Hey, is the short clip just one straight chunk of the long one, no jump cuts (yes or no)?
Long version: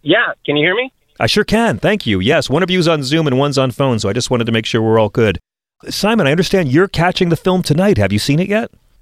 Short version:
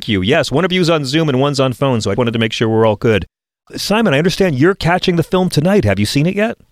no